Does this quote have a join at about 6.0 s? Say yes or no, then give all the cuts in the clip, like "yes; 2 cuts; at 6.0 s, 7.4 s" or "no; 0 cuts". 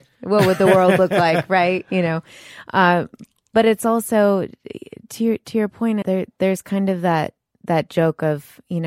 yes; 1 cut; at 6.0 s